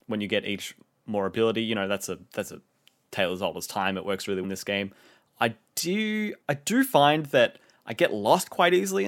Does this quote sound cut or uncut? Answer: cut